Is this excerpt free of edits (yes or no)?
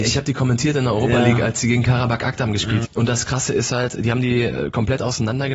no